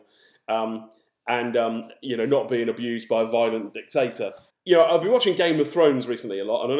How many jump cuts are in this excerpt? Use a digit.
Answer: 1